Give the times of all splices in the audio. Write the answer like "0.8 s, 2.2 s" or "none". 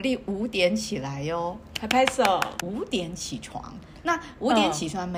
2.6 s